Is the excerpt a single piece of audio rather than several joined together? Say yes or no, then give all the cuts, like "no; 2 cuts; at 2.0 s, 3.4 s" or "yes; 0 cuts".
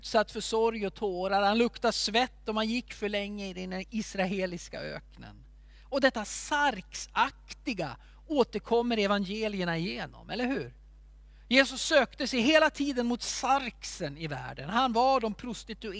yes; 0 cuts